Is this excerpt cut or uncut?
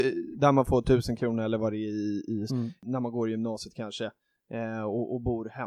cut